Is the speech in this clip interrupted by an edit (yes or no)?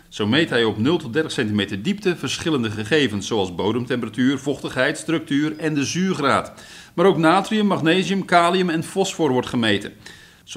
no